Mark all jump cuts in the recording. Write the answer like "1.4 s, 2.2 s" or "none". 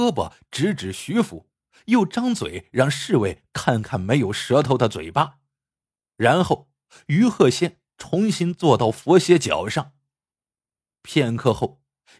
none